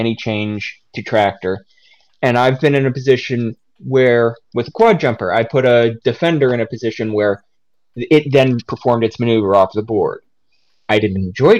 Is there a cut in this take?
no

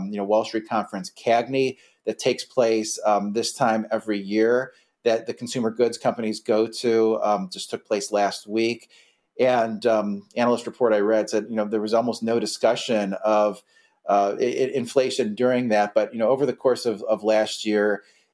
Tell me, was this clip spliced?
no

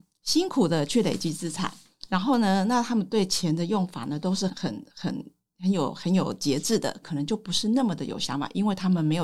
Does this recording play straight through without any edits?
no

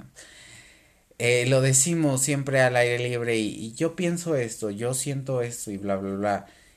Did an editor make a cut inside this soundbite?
no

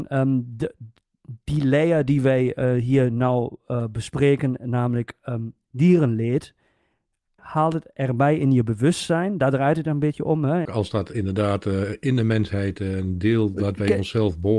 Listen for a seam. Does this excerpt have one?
yes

